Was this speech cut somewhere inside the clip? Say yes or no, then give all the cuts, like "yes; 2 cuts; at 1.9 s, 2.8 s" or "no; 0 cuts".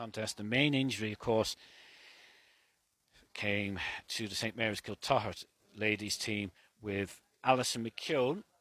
no; 0 cuts